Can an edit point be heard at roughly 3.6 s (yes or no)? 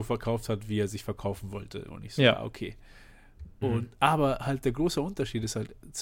yes